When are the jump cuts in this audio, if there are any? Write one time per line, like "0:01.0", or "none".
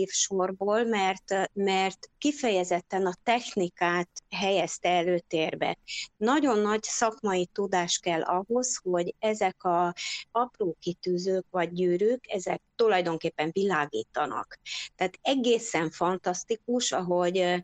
0:01.5